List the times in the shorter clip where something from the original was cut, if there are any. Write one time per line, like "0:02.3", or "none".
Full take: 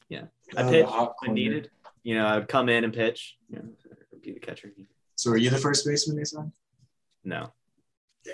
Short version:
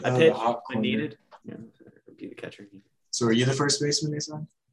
0:01.4